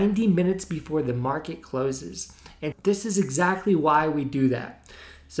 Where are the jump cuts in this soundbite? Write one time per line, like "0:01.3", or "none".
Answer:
0:02.7